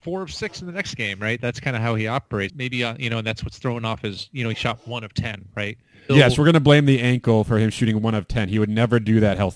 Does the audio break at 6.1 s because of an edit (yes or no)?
yes